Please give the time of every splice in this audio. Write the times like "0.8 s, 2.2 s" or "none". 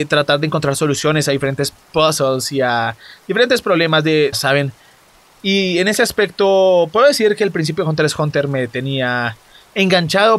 4.3 s